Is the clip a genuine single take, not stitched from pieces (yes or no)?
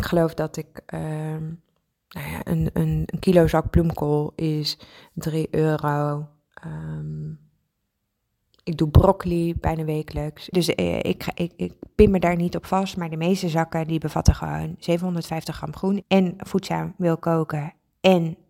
no